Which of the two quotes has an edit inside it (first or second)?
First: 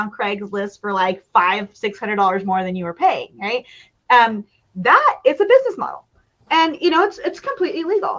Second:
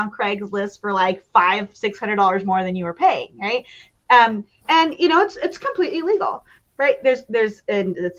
second